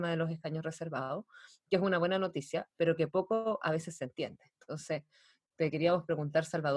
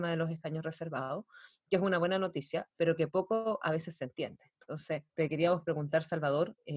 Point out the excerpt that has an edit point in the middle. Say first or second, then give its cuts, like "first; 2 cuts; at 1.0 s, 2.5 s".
second; 1 cut; at 5.1 s